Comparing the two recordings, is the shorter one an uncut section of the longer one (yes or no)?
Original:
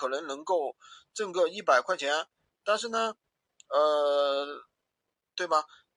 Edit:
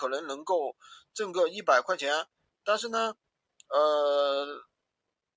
yes